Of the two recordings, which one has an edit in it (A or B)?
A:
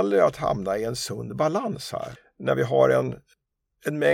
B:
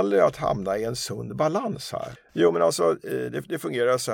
B